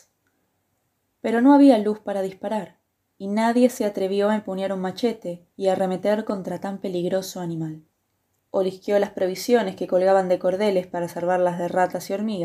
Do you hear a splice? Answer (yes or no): yes